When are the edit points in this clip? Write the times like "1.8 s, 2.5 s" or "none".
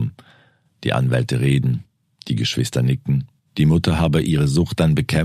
3.5 s

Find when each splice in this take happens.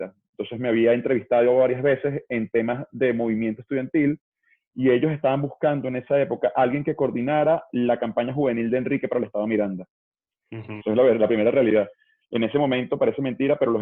10.8 s, 12.2 s

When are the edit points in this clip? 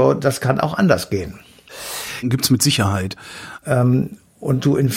2.2 s, 3.6 s

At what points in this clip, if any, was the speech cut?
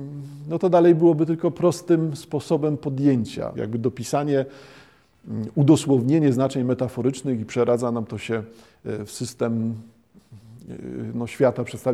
3.5 s

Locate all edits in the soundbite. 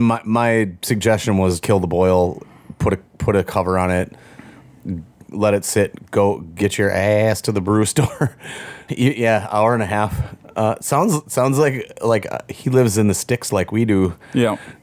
1.6 s, 8.9 s

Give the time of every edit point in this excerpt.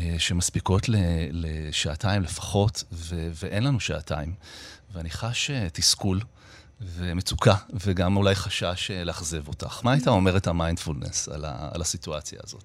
none

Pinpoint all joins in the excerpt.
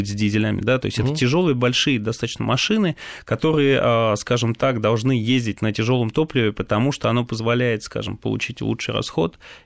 none

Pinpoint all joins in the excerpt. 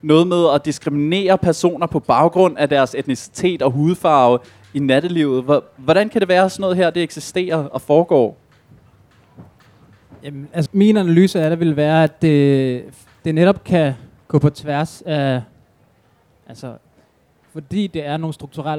10.7 s, 17.4 s

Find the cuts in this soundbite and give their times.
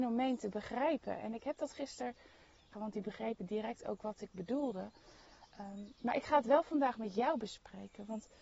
2.7 s

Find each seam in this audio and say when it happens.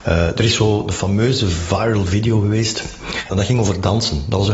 3.3 s

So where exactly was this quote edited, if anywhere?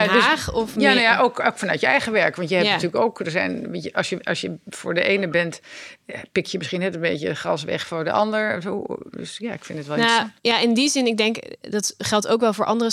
none

